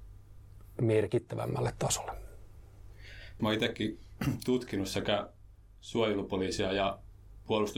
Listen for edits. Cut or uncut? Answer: cut